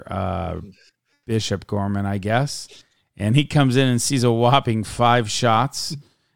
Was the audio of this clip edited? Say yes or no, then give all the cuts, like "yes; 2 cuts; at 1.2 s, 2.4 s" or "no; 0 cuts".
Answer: no; 0 cuts